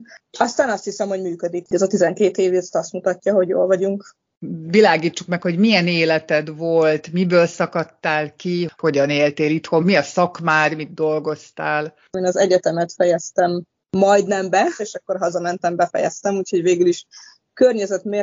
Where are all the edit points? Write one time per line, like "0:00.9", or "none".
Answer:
0:09.8
0:14.8